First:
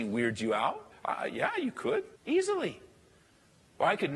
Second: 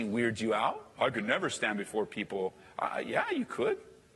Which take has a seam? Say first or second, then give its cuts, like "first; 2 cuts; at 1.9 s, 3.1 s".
first; 2 cuts; at 0.9 s, 2.2 s